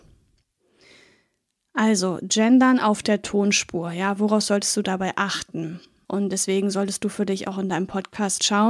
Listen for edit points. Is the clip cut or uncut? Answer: cut